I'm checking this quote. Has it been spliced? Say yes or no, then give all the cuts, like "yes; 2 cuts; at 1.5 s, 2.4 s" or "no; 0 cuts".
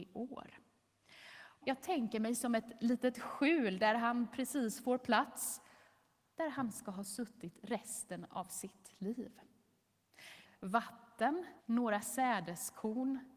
yes; 3 cuts; at 1.6 s, 10.4 s, 11.6 s